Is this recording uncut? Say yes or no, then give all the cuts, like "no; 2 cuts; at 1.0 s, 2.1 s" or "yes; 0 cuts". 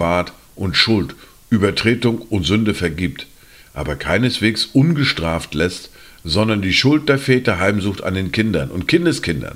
yes; 0 cuts